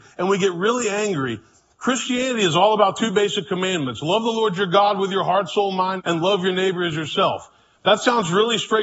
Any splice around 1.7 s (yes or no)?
no